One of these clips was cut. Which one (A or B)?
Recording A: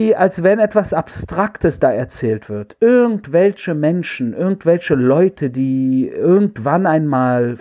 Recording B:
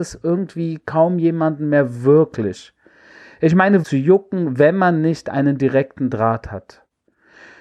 B